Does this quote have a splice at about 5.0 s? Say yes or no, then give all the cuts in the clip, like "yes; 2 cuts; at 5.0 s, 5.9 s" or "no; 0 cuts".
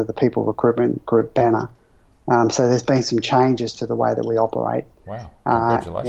no; 0 cuts